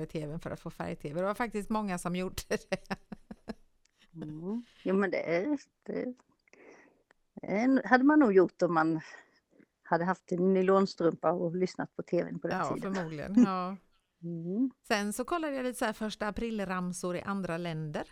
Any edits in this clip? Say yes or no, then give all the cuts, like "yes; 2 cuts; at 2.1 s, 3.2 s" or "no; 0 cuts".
no; 0 cuts